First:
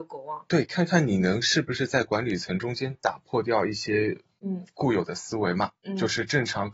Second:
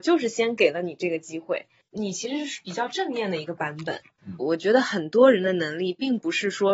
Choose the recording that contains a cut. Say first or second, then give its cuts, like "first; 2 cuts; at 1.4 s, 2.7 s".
second; 2 cuts; at 1.8 s, 4.4 s